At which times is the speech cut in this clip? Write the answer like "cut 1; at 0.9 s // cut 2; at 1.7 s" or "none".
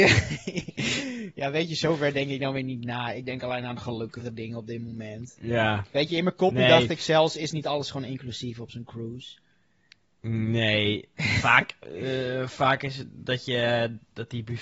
none